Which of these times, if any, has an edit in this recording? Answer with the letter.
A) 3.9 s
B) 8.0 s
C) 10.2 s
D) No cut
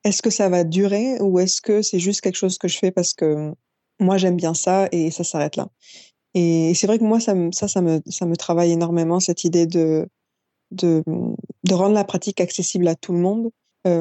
D